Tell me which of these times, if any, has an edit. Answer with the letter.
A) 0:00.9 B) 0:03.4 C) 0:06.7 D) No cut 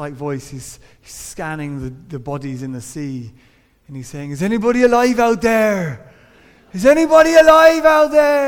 D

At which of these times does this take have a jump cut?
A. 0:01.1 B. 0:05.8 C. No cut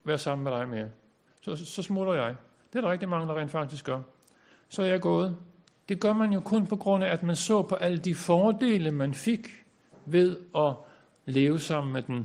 B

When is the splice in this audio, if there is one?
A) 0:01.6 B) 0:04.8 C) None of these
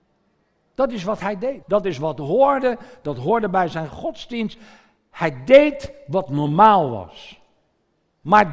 A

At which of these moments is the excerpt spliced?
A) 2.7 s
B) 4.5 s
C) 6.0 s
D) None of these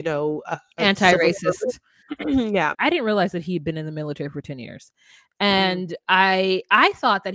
A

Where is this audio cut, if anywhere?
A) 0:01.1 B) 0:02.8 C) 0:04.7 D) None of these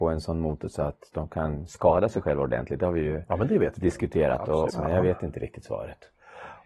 C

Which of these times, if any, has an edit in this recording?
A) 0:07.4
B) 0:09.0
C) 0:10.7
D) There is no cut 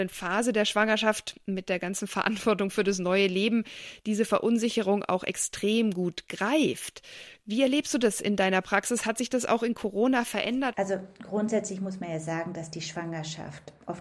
C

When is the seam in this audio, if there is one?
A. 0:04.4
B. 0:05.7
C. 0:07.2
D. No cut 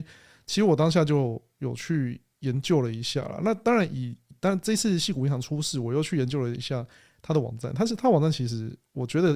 D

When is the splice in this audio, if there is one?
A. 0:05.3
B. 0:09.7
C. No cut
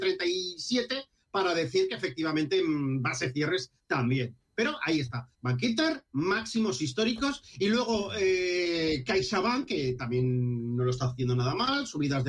A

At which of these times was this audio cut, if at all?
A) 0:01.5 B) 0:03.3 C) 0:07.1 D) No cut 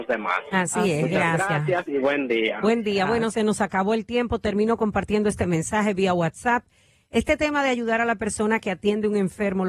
B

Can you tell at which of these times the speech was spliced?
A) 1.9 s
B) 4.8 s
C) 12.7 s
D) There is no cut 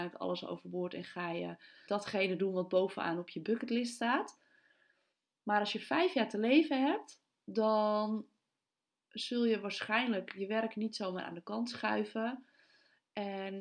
A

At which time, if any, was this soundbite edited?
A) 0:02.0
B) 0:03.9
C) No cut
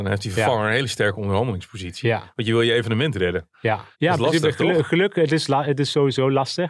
B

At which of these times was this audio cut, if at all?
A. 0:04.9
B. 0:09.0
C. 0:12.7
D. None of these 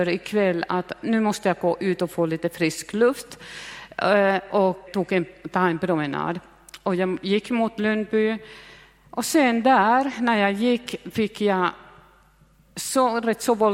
A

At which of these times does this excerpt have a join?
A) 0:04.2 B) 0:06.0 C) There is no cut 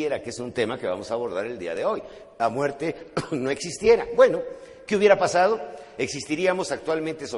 C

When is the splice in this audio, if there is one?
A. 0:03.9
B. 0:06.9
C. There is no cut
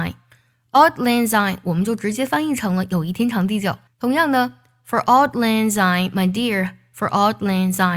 A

